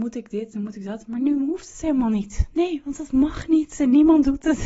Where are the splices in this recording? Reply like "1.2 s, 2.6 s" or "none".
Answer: none

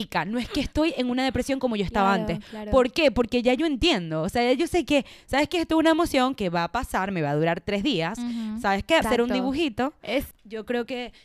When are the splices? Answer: 9.0 s, 10.3 s

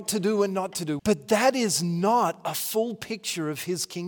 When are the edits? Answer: 1.0 s

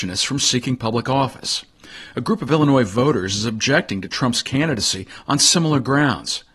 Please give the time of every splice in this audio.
none

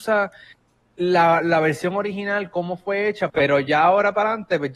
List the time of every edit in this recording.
3.3 s

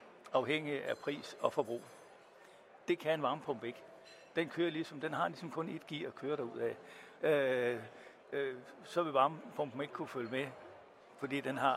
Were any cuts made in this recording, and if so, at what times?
7.2 s

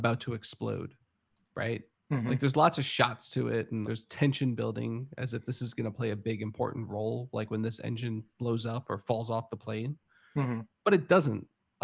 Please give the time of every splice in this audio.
3.8 s

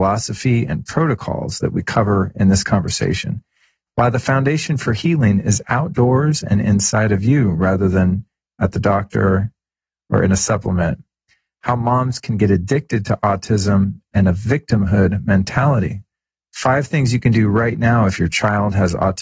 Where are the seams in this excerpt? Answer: 3.9 s

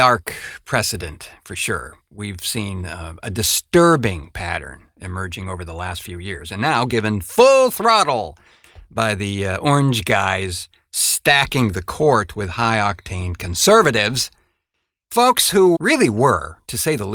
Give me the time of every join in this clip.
15.7 s

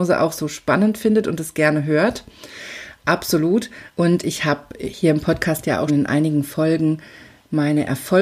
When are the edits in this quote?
3.9 s, 5.9 s

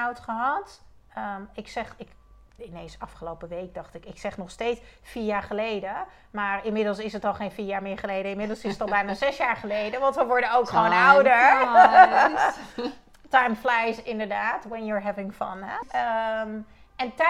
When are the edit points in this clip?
15.8 s

